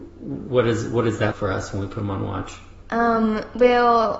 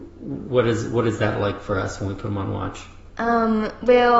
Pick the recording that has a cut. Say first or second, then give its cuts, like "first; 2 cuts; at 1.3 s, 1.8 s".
first; 1 cut; at 1.3 s